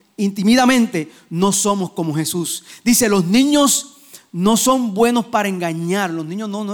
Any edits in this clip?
no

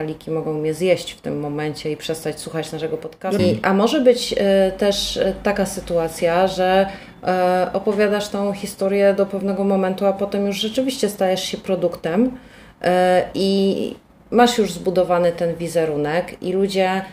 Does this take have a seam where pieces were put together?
yes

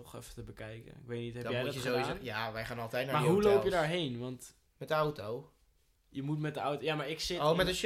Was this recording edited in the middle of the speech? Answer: no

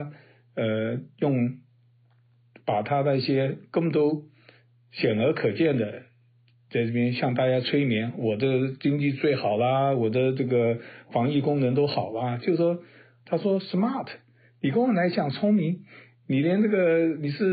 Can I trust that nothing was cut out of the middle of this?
no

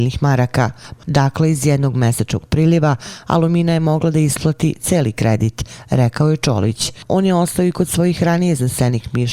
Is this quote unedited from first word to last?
no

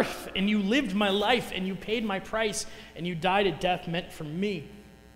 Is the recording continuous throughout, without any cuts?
yes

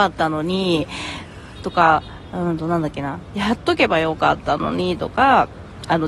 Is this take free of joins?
yes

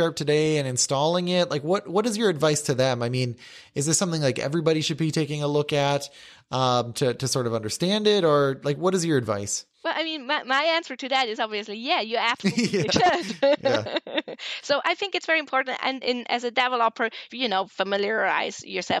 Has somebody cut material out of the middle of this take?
yes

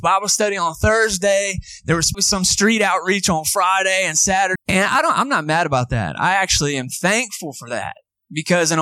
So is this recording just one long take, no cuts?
no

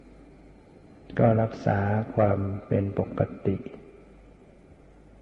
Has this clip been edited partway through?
no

